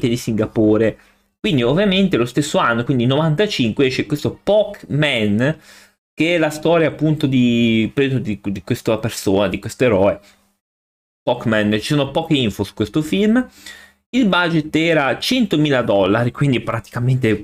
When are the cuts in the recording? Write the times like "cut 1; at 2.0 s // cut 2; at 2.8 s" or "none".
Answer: none

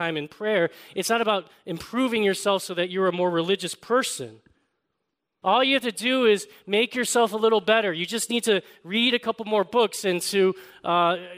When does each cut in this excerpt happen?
cut 1; at 5.4 s

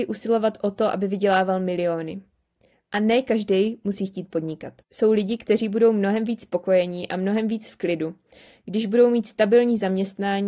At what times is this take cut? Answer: cut 1; at 4.8 s

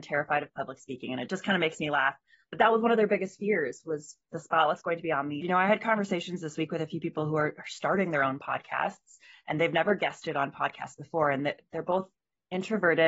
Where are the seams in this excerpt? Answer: cut 1; at 4.3 s // cut 2; at 5.4 s

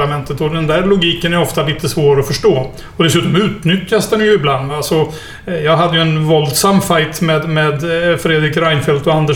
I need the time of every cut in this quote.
none

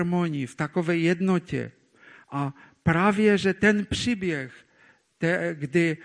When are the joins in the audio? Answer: none

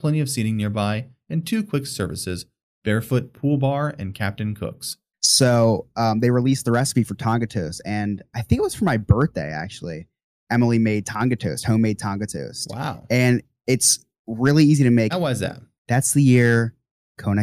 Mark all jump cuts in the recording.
cut 1; at 5.1 s // cut 2; at 15.1 s

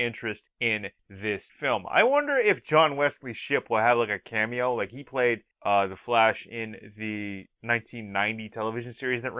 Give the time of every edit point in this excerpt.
none

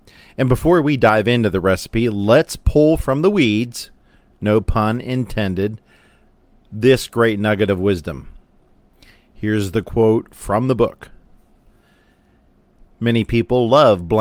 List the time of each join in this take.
cut 1; at 12.9 s

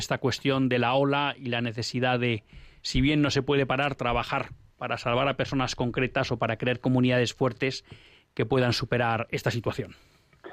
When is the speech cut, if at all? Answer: none

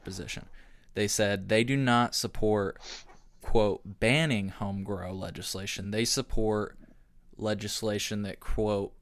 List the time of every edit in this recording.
none

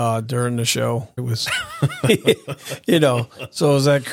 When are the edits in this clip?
cut 1; at 1.2 s

